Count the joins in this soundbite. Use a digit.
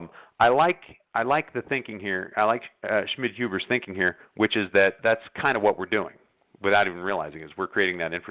1